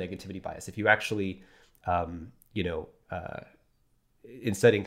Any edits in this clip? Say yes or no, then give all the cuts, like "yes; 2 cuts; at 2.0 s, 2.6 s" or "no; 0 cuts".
no; 0 cuts